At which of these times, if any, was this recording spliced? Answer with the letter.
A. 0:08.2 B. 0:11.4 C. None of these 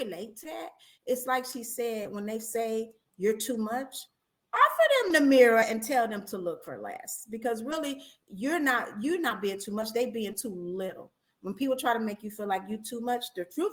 B